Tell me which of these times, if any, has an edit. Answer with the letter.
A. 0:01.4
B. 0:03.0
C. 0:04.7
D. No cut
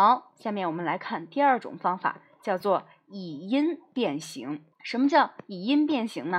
C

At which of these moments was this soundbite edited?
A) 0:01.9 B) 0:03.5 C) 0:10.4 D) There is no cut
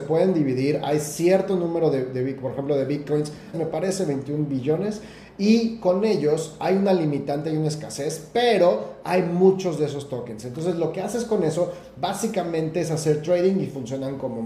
B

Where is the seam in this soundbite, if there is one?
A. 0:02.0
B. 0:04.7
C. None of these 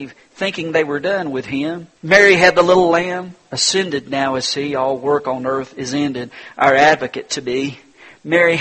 A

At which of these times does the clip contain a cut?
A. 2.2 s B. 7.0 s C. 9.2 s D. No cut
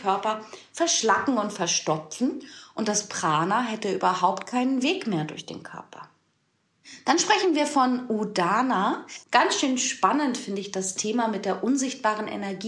C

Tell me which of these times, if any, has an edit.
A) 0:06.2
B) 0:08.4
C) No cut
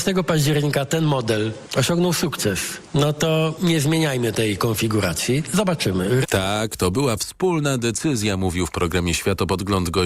A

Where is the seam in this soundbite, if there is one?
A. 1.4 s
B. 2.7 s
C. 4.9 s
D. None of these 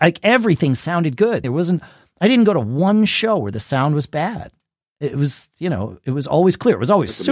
A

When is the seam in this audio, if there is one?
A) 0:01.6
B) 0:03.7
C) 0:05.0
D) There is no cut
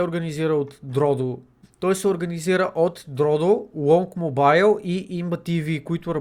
A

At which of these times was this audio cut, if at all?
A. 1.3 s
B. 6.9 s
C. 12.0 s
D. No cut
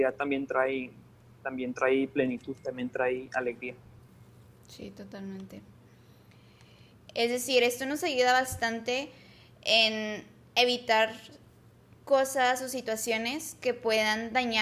B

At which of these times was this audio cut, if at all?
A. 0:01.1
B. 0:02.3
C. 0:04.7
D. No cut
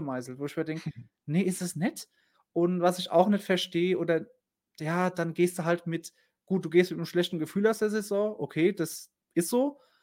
B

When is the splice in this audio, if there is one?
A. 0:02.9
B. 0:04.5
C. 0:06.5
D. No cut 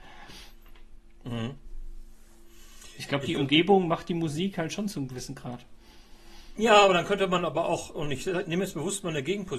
D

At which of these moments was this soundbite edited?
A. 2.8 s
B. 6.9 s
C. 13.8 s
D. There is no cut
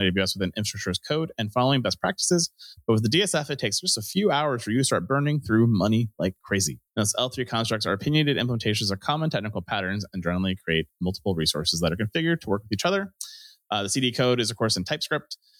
B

